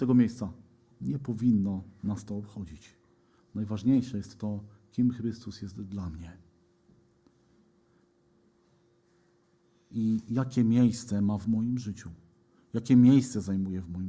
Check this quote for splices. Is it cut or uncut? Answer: cut